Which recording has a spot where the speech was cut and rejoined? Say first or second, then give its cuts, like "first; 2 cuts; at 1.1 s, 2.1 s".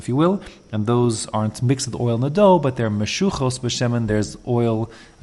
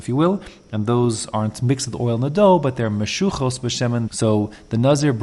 second; 1 cut; at 4.1 s